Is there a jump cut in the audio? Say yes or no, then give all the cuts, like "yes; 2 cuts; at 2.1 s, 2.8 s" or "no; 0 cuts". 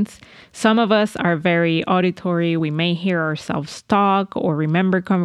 no; 0 cuts